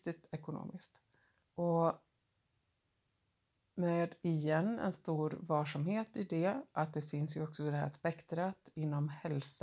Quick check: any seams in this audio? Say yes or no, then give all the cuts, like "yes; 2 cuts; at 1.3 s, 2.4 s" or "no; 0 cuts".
yes; 1 cut; at 1.4 s